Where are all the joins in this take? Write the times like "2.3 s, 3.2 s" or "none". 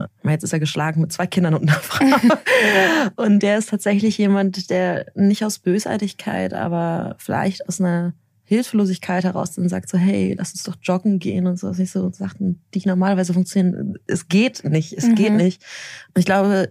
none